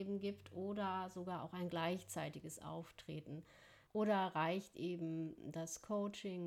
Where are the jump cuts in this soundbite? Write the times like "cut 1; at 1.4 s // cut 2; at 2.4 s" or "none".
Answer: cut 1; at 3.9 s

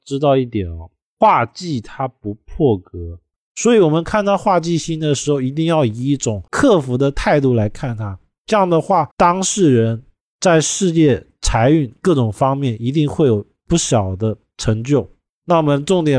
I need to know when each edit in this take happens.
cut 1; at 3.3 s // cut 2; at 6.5 s // cut 3; at 9.1 s

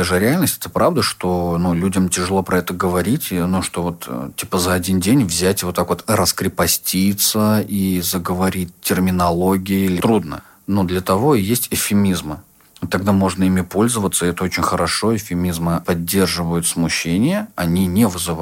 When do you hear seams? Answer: none

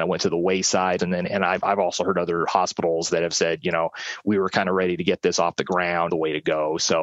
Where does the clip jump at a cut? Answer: cut 1; at 1.0 s // cut 2; at 6.1 s

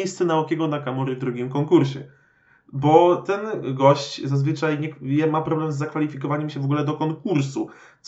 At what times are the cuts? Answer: none

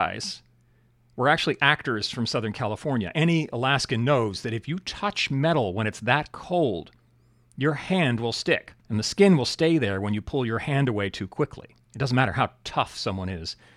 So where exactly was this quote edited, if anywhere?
cut 1; at 8.8 s // cut 2; at 11.8 s

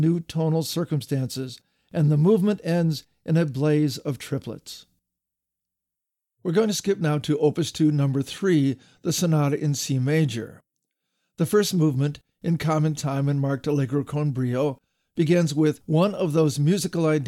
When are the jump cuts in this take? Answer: none

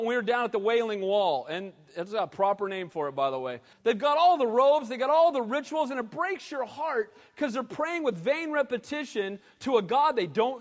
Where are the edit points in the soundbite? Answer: cut 1; at 3.7 s

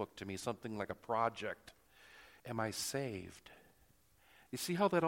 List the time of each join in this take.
cut 1; at 2.4 s

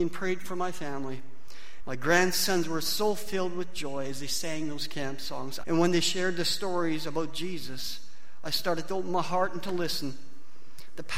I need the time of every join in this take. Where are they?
cut 1; at 1.8 s // cut 2; at 5.6 s

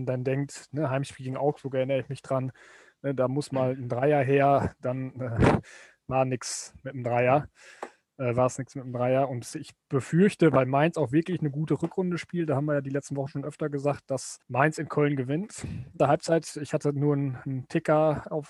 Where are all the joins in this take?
cut 1; at 14.4 s // cut 2; at 16.0 s

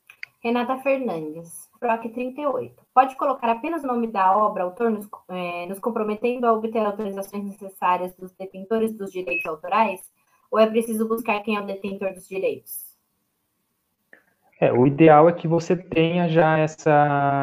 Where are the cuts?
cut 1; at 1.7 s

